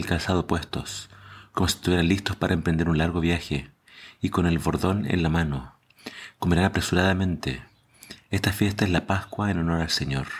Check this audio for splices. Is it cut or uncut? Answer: uncut